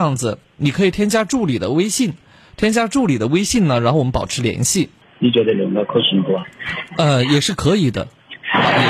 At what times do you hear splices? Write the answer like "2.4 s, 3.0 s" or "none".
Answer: 5.0 s